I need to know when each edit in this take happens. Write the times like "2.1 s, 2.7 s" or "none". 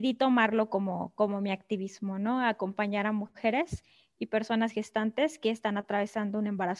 none